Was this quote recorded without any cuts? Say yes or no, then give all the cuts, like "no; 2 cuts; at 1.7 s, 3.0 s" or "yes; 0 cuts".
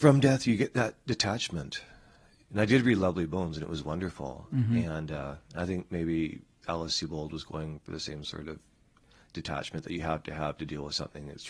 yes; 0 cuts